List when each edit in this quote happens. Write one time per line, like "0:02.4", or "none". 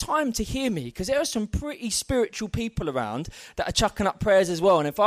none

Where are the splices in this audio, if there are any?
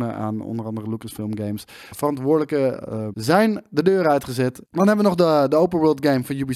0:01.9
0:03.1
0:04.6

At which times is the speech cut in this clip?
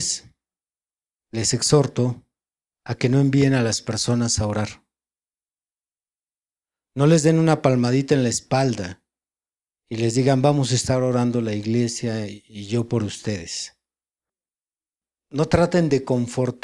0:01.2

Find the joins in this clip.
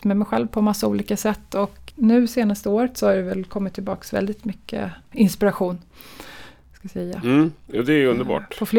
0:01.9

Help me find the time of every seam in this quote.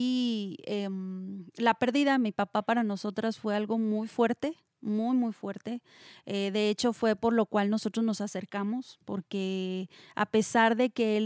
none

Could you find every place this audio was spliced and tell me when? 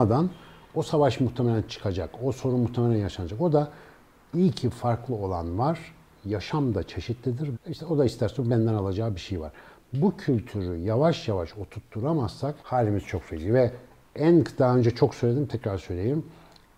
0:07.5
0:12.6

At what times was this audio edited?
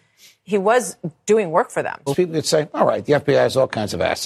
0:02.1

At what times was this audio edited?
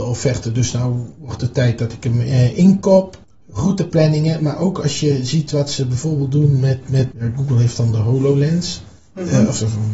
none

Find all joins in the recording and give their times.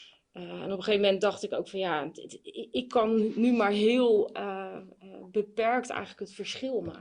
none

